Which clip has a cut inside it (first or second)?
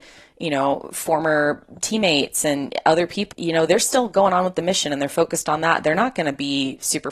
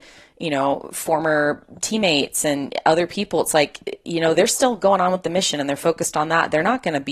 first